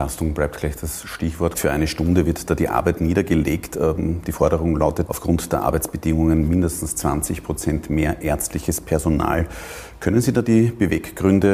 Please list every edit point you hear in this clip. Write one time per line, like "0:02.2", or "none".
0:01.5
0:05.1